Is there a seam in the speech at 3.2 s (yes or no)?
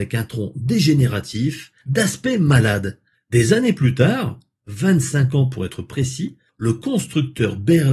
yes